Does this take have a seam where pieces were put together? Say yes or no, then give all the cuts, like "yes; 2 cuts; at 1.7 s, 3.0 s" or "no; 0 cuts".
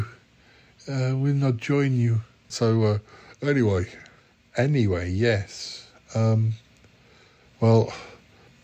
yes; 1 cut; at 2.5 s